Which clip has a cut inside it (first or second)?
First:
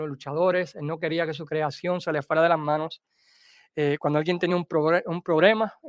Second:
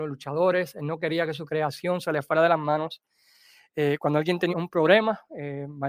second